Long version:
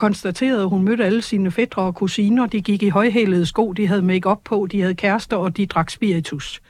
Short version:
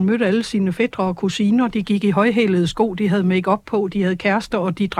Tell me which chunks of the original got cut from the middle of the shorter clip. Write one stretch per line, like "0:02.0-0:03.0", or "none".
none